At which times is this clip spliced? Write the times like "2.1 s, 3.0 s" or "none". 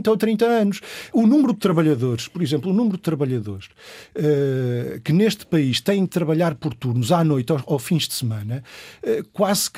none